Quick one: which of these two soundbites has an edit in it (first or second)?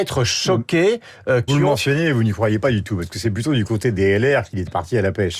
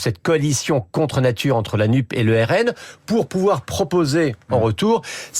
first